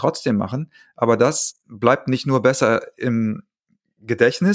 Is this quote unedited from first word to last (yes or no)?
yes